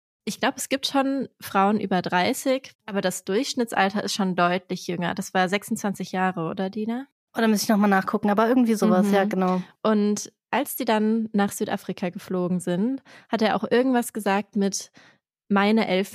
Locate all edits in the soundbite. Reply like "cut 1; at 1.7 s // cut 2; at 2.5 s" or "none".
cut 1; at 2.7 s